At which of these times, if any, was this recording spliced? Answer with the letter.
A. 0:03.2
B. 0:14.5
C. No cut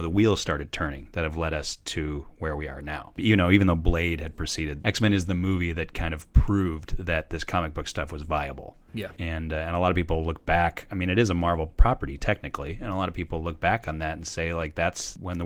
A